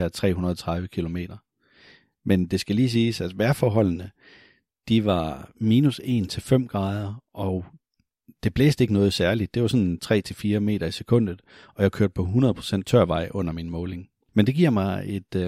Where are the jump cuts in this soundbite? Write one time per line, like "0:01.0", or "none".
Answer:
0:14.3